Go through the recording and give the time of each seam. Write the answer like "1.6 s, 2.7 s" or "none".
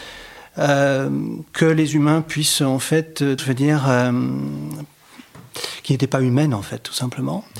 3.4 s

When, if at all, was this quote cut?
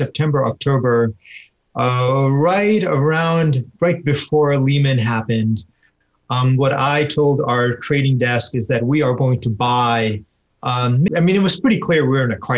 11.1 s

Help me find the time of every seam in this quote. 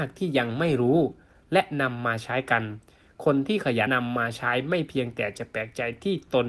3.9 s

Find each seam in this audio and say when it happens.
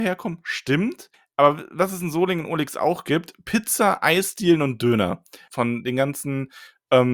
5.5 s

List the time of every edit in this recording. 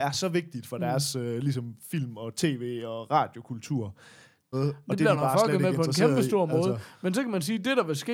4.5 s

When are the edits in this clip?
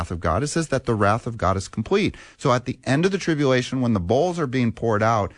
none

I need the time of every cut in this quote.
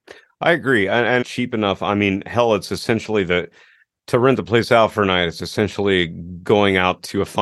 1.2 s

